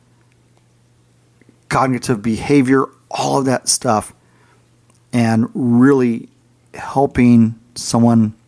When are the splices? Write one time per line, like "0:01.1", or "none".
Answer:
none